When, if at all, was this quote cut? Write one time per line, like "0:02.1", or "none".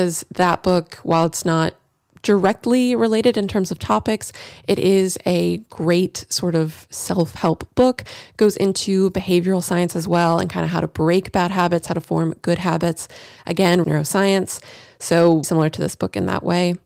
0:13.8
0:15.4